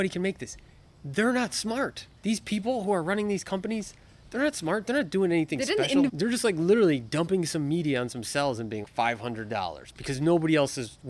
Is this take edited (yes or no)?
yes